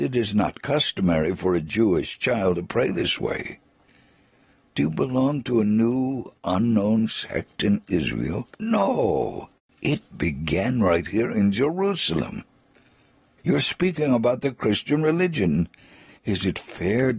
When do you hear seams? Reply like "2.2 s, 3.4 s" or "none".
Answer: 8.5 s, 13.4 s, 16.1 s